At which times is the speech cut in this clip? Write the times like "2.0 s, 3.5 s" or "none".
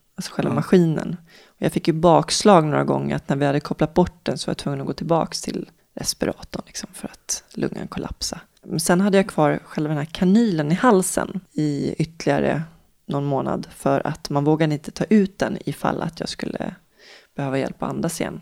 none